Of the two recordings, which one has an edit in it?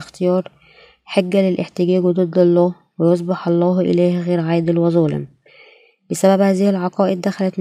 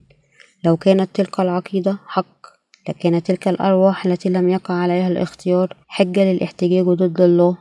second; 1 cut; at 5.8 s

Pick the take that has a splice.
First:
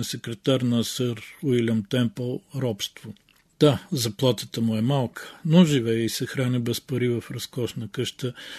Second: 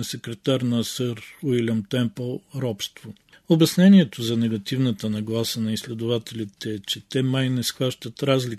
second; 1 cut; at 3.3 s

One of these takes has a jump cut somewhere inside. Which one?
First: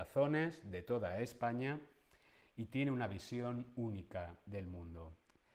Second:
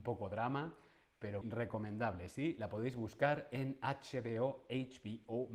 second; 1 cut; at 1.4 s

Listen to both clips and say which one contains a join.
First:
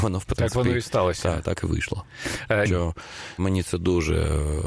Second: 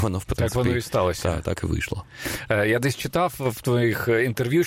first; 1 cut; at 2.7 s

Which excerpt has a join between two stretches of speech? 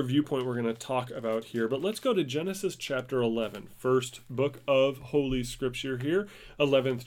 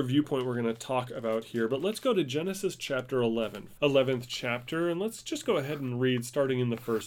second; 1 cut; at 3.8 s

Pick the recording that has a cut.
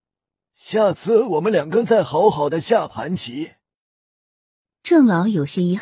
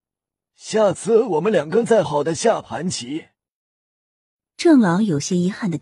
second; 1 cut; at 2.0 s

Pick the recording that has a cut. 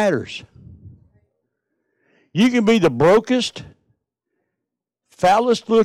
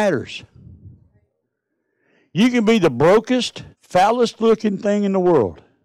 second; 1 cut; at 3.7 s

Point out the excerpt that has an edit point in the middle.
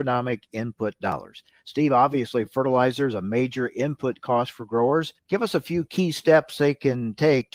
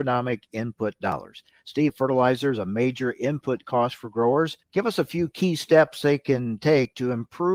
second; 1 cut; at 1.9 s

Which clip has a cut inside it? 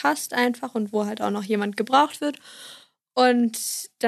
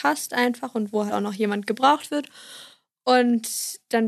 second; 1 cut; at 1.1 s

